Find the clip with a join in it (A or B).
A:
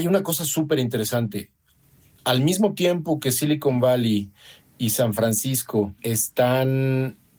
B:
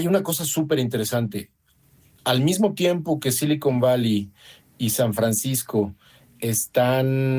A